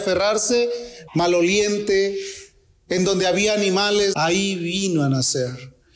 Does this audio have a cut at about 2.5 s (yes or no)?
no